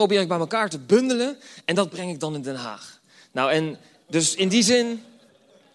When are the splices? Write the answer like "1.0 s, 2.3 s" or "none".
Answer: none